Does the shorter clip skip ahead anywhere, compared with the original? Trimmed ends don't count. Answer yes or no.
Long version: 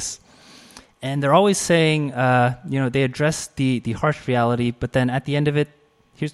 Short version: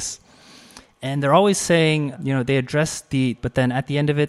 yes